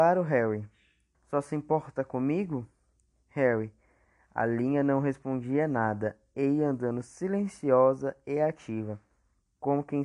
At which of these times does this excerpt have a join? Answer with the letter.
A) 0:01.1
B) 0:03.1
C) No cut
A